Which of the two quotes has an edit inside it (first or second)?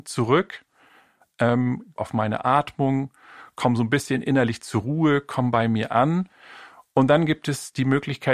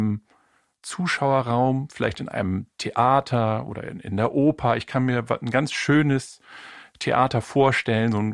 first